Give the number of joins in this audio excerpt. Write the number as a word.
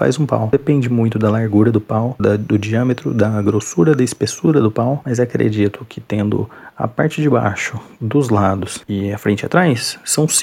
one